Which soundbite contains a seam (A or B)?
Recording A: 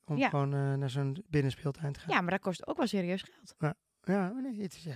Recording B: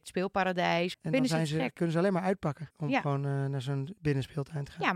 B